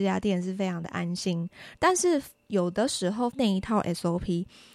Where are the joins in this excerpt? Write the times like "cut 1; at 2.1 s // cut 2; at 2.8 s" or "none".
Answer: cut 1; at 1.7 s // cut 2; at 3.3 s